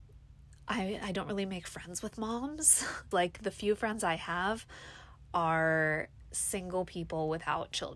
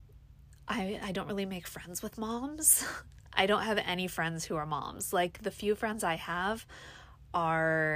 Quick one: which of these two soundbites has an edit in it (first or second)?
first